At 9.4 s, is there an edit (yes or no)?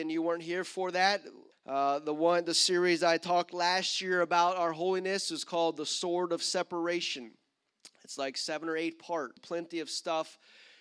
yes